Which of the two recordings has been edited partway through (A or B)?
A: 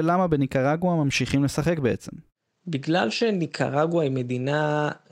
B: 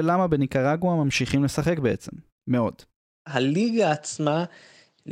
B